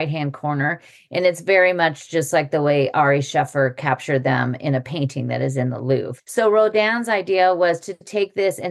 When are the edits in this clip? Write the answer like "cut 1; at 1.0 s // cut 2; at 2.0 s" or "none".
cut 1; at 6.2 s